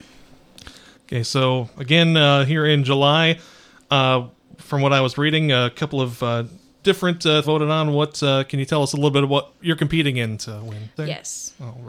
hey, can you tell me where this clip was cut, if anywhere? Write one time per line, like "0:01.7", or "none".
0:07.4
0:09.6
0:11.0